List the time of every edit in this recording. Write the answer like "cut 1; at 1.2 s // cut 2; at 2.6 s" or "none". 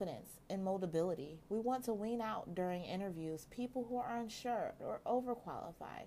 cut 1; at 4.8 s